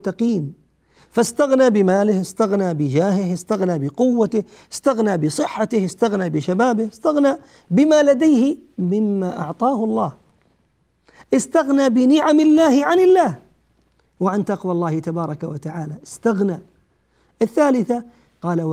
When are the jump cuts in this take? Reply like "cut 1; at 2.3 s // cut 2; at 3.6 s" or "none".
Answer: none